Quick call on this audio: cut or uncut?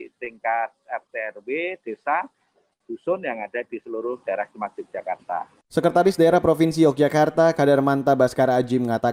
uncut